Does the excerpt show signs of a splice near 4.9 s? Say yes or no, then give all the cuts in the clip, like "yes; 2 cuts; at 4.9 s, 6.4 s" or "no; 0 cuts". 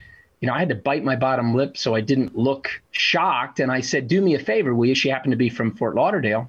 yes; 2 cuts; at 2.8 s, 4.9 s